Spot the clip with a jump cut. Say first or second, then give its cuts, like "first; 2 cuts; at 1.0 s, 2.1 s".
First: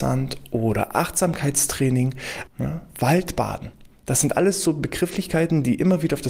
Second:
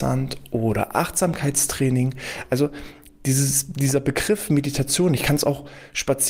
first; 1 cut; at 2.5 s